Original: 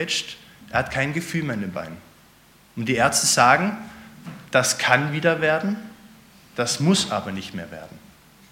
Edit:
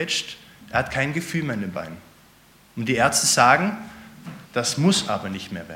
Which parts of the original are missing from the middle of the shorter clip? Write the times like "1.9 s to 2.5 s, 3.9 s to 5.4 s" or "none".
4.4 s to 6.5 s